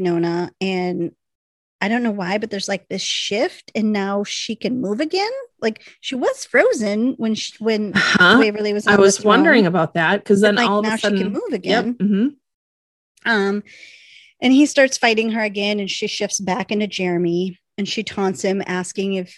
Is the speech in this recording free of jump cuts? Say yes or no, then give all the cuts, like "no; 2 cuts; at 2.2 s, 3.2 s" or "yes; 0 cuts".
yes; 0 cuts